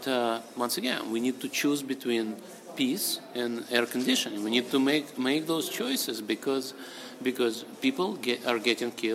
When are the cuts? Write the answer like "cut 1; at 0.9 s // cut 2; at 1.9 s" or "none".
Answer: none

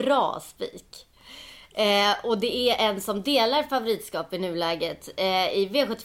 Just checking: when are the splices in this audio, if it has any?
none

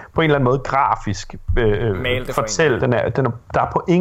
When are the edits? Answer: cut 1; at 2.8 s

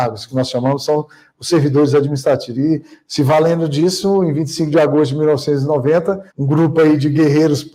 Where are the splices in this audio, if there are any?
cut 1; at 2.5 s // cut 2; at 6.3 s

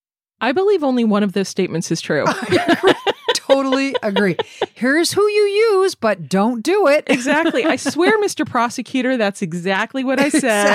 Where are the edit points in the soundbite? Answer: none

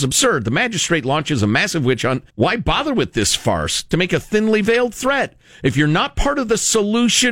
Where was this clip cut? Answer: cut 1; at 2.3 s

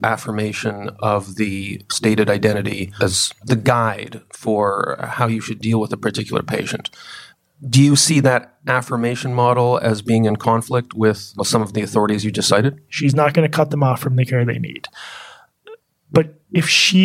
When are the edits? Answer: cut 1; at 12.9 s

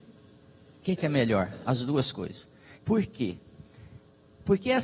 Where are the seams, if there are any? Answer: cut 1; at 2.7 s

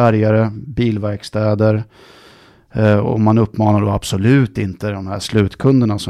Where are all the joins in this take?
none

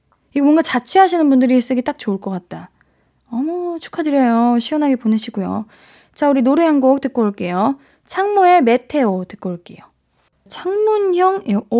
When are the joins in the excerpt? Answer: cut 1; at 10.5 s

